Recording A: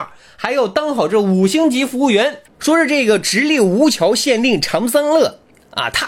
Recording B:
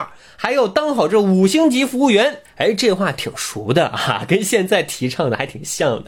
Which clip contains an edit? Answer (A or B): A